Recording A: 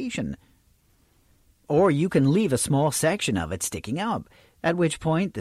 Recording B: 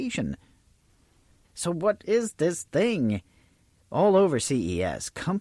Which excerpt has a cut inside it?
B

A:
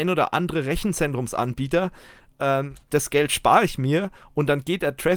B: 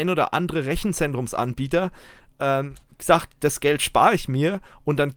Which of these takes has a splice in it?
A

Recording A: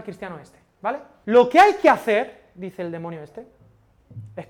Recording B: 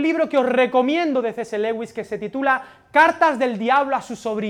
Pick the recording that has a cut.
A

